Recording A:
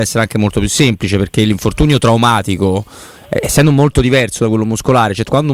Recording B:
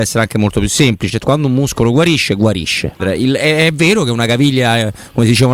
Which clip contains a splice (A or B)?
B